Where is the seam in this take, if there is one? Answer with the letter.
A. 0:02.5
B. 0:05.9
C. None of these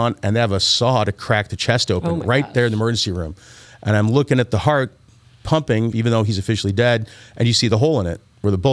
B